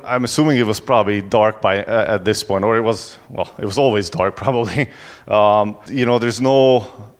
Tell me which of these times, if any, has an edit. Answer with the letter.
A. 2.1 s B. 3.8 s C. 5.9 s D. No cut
C